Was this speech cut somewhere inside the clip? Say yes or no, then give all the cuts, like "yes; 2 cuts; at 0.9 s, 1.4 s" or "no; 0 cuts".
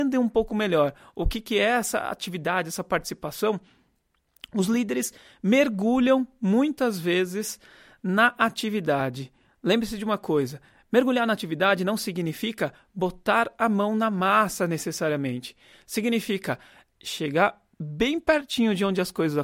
no; 0 cuts